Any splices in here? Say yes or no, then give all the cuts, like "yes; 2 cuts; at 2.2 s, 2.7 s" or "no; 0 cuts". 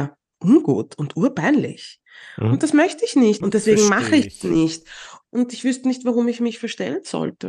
yes; 2 cuts; at 3.4 s, 5.2 s